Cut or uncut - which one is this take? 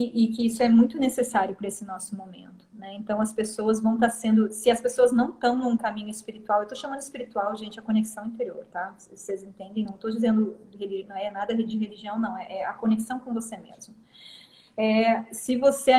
uncut